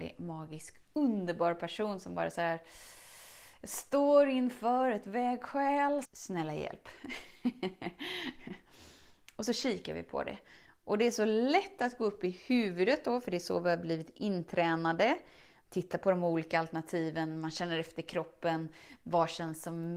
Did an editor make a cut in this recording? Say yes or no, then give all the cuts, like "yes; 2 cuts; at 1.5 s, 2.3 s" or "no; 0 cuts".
yes; 1 cut; at 6.0 s